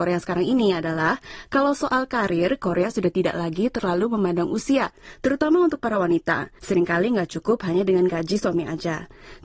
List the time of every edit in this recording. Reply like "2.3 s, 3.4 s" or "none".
6.6 s